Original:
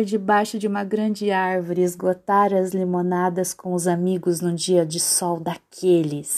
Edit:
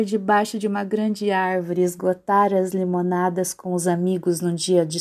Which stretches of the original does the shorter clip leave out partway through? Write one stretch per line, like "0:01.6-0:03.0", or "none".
none

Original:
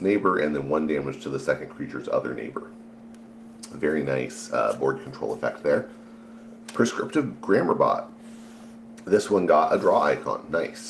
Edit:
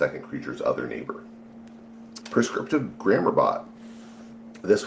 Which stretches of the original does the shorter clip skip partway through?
0:03.7-0:06.6

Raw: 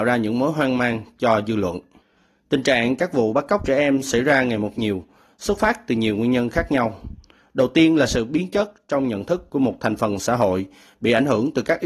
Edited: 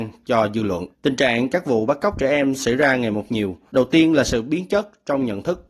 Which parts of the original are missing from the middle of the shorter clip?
0:01.8-0:02.4
0:05.2-0:07.5

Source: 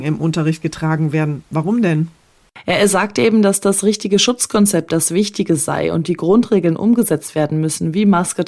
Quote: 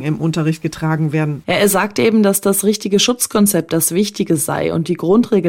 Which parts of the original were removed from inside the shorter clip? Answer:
0:01.4-0:02.6

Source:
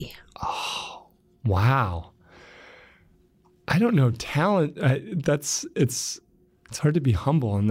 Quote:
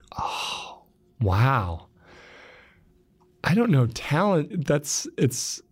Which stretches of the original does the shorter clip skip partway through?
0:04.7-0:05.1

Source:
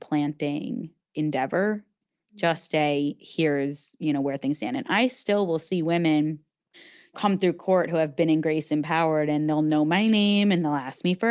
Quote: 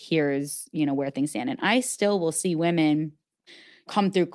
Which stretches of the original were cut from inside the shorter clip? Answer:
none

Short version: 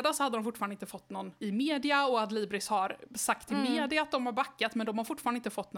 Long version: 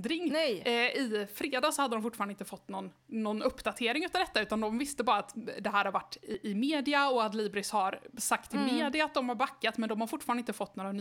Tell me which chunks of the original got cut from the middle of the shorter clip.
0:03.0-0:06.4

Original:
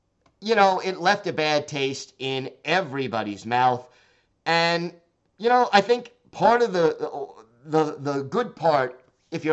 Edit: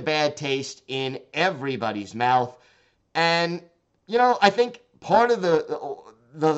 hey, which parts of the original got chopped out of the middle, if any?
none

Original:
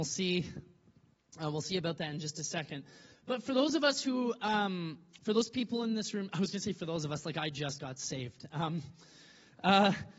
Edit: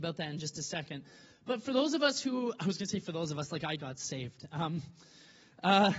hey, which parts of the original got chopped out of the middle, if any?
0:04.4-0:06.3
0:07.5-0:07.8

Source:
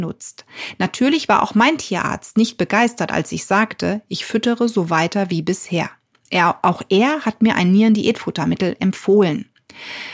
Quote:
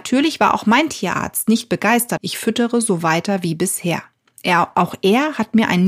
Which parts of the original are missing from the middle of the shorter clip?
0:03.1-0:04.0

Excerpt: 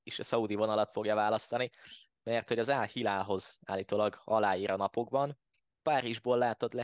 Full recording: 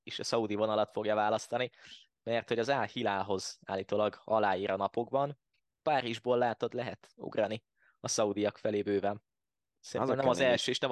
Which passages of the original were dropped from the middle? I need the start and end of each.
none

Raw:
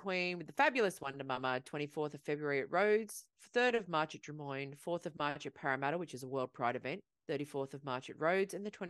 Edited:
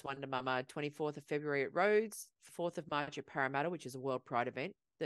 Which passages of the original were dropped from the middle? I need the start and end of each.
0:03.5-0:04.8

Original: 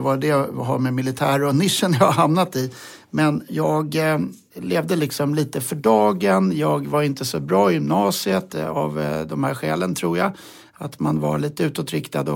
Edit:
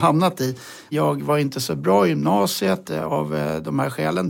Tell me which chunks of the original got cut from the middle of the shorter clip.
0:03.1-0:06.6

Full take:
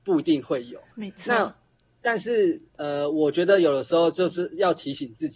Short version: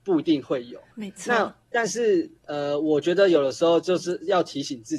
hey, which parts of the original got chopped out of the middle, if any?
0:01.6-0:01.9

